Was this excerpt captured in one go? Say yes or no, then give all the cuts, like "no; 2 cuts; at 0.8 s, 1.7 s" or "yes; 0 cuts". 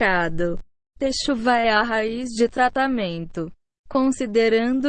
no; 1 cut; at 3.8 s